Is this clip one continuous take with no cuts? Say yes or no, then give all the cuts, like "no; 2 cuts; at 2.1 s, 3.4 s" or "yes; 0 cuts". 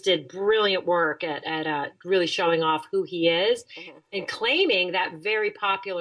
yes; 0 cuts